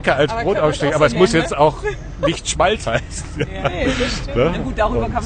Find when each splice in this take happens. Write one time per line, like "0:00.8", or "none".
none